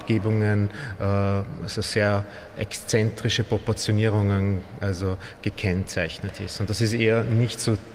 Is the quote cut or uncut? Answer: uncut